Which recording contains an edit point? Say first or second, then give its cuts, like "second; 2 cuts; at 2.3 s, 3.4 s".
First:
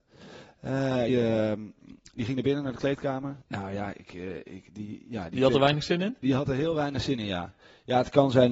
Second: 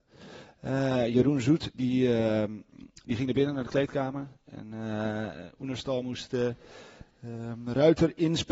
first; 2 cuts; at 1.1 s, 3.4 s